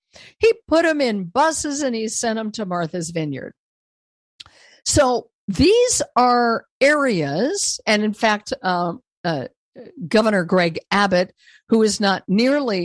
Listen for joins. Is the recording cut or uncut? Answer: uncut